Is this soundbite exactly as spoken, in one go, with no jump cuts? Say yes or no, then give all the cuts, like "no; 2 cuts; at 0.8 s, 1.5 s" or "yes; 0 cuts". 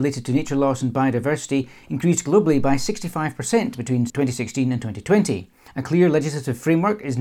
no; 1 cut; at 5.7 s